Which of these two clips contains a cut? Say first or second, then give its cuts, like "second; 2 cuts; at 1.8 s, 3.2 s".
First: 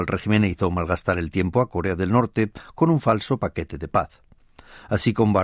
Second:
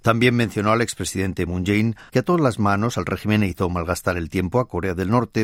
second; 1 cut; at 2.1 s